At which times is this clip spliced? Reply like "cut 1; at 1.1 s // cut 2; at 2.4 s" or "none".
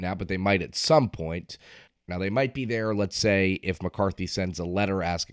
cut 1; at 2.1 s